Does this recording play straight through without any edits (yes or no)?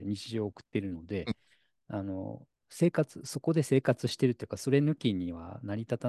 yes